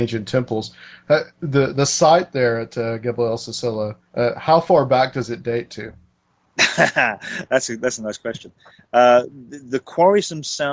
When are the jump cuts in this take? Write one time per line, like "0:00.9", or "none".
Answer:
0:04.0